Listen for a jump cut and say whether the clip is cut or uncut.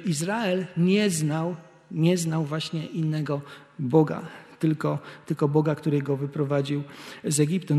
uncut